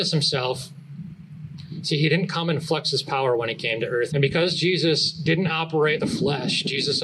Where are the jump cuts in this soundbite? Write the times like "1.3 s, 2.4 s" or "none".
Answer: 4.1 s, 6.0 s